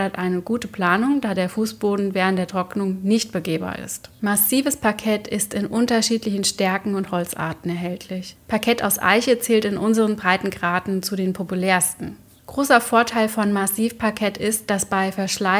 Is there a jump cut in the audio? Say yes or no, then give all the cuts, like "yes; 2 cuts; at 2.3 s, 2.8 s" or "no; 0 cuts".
no; 0 cuts